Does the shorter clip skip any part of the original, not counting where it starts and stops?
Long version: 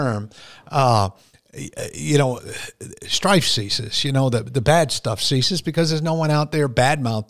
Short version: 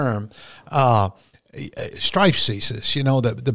yes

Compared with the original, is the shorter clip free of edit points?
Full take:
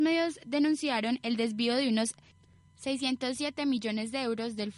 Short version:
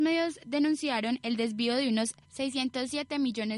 no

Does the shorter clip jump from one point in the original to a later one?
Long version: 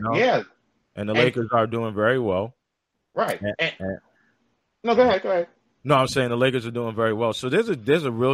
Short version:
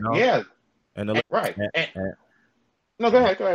yes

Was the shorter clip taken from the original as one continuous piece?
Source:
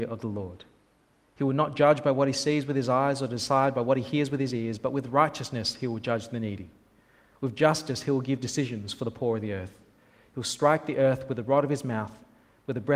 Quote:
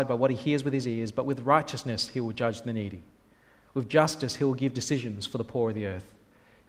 yes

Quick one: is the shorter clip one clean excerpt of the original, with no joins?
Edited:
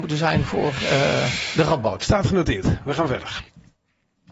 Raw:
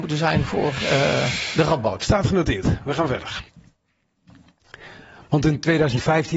yes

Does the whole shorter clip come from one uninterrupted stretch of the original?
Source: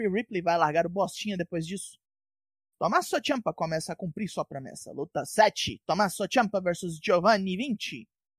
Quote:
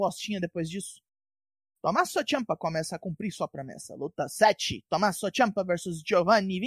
yes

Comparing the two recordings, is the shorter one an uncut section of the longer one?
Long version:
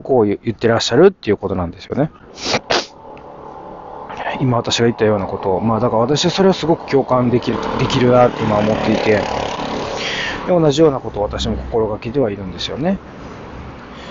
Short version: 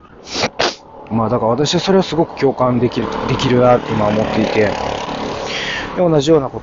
no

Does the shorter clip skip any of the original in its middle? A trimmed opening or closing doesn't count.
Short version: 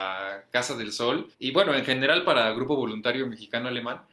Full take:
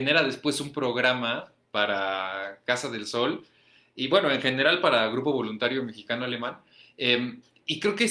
yes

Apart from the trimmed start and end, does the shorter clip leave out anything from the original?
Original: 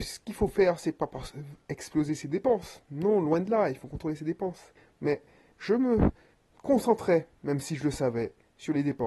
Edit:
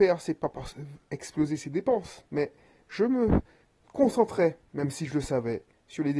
yes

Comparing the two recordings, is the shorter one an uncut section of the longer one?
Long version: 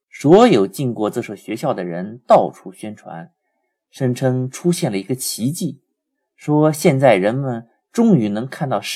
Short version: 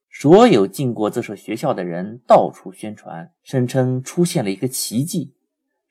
no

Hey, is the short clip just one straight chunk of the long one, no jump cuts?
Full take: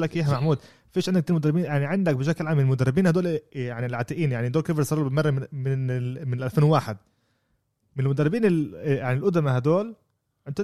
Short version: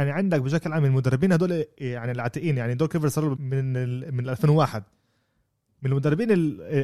no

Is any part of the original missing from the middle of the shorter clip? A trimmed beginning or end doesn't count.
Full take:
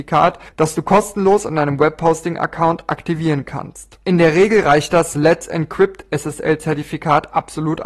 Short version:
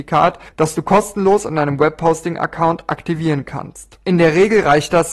no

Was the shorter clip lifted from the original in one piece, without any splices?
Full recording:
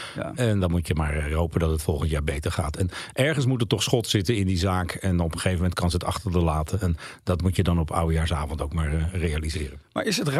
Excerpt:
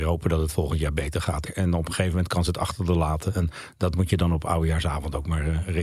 no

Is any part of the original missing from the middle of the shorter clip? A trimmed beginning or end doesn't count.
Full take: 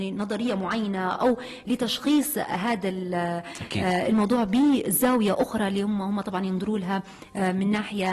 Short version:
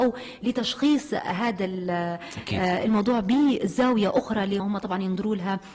yes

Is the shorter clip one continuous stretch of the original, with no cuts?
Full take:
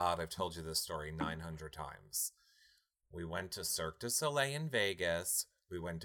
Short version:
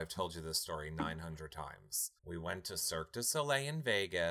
no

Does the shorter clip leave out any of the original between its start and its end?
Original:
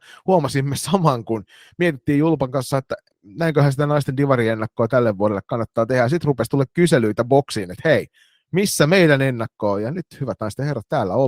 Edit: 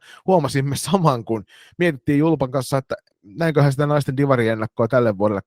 no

